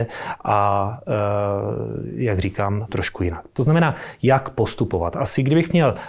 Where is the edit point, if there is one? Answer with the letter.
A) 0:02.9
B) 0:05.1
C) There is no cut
A